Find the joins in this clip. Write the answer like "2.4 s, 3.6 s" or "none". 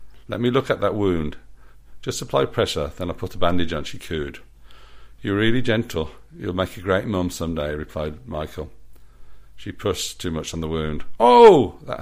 none